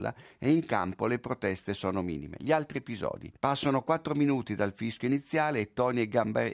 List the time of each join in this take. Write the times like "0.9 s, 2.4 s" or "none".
3.4 s